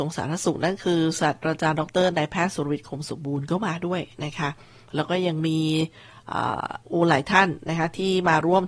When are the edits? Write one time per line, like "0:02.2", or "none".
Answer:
0:06.8